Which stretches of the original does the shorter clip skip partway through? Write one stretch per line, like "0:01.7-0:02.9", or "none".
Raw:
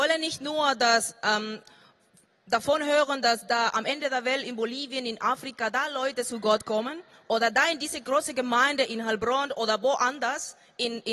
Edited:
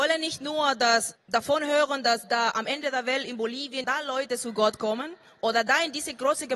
0:01.1-0:02.3
0:05.0-0:05.7